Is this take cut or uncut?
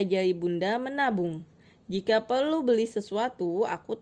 uncut